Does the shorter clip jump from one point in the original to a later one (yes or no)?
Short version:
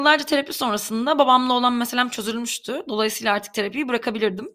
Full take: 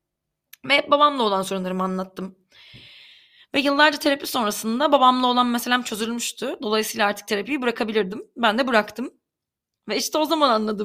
no